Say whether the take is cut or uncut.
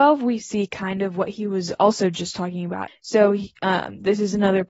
cut